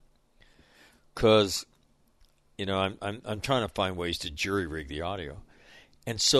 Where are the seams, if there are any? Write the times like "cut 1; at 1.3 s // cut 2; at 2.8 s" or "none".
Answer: none